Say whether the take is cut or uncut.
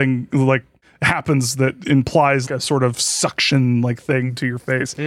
cut